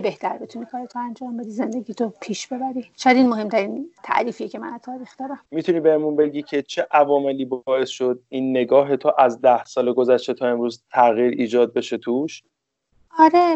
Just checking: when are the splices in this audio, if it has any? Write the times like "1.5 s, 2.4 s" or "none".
5.5 s